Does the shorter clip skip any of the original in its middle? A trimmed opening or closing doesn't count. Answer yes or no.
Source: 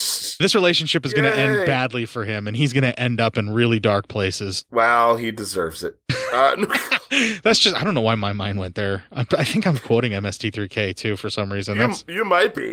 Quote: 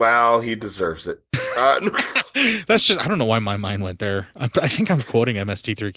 no